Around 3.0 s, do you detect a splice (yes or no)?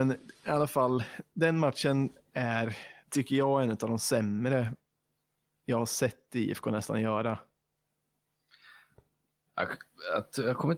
yes